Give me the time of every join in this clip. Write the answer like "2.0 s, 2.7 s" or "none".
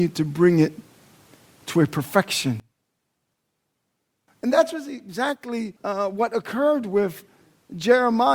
4.3 s, 5.8 s